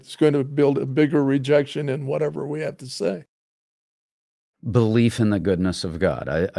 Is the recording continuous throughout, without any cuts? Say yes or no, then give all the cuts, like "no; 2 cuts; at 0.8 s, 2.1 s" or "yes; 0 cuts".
yes; 0 cuts